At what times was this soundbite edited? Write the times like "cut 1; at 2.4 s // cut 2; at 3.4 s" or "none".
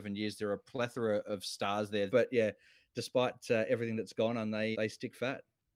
cut 1; at 2.1 s // cut 2; at 4.7 s